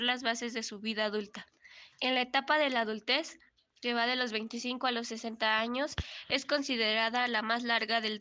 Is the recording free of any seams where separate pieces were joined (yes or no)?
no